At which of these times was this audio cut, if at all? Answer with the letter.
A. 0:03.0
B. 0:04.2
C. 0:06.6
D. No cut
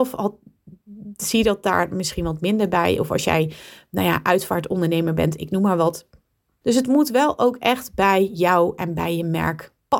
C